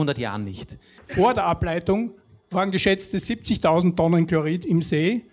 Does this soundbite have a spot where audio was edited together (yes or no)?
yes